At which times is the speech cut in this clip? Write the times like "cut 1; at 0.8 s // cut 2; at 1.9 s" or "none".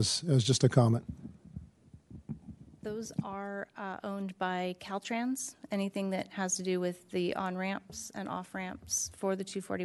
none

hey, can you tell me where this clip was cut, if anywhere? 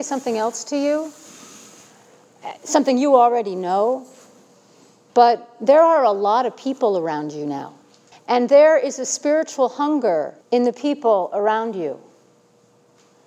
cut 1; at 8.1 s // cut 2; at 10.4 s

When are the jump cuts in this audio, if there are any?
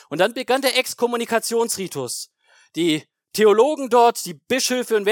none

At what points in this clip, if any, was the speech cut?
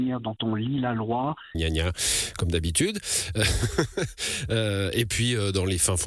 cut 1; at 1.5 s

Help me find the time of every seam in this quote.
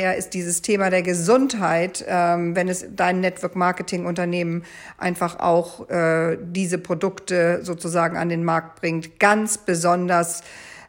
none

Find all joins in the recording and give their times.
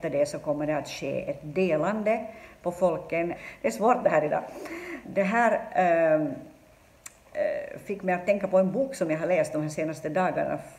cut 1; at 3.3 s // cut 2; at 5.0 s

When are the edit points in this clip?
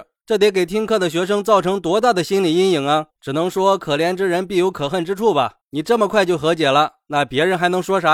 cut 1; at 3.1 s

